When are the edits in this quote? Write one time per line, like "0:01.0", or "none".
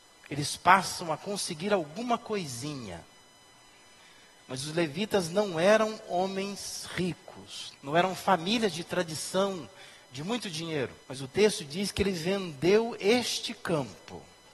0:07.7
0:11.0